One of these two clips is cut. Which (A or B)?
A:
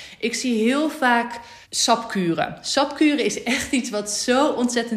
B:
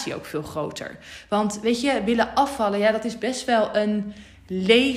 A